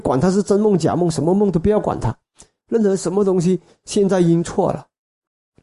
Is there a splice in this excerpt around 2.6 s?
yes; 1 cut; at 2.6 s

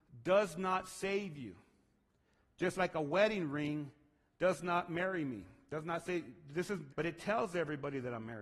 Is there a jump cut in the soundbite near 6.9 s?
yes; 1 cut; at 6.9 s

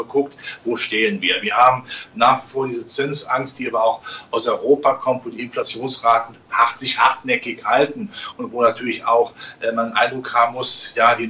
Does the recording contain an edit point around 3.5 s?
yes; 2 cuts; at 1.4 s, 3.5 s

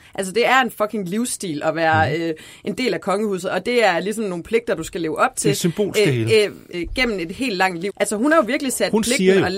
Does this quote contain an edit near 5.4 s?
no; 2 cuts; at 6.7 s, 7.9 s

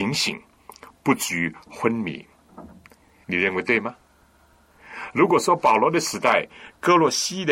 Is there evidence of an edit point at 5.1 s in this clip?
no; 1 cut; at 3.2 s

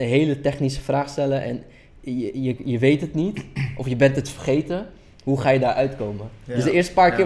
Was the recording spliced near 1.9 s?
no; 0 cuts

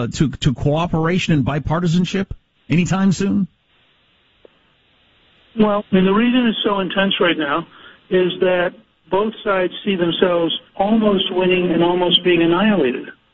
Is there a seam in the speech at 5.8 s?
yes; 2 cuts; at 5.8 s, 10.7 s

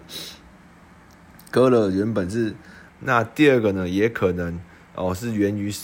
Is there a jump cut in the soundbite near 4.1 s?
no; 1 cut; at 2.9 s

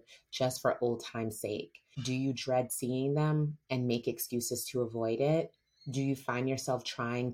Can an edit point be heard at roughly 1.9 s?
yes; 1 cut; at 1.9 s

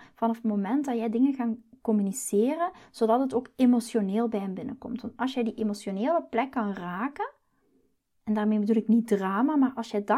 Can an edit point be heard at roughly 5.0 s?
no; 0 cuts

